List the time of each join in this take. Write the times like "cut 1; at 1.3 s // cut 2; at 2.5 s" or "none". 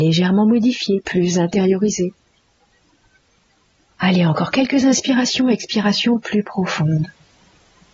none